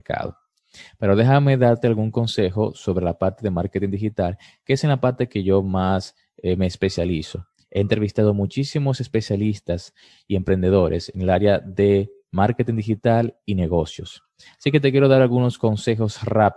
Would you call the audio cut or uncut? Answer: uncut